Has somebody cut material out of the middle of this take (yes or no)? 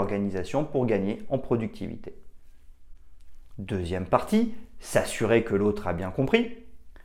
no